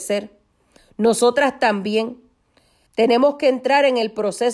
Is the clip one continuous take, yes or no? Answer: no